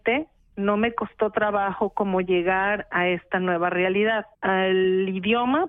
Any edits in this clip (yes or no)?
yes